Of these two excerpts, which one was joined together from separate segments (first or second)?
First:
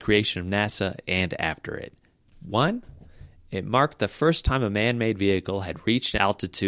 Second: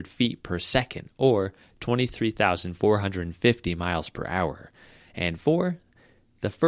first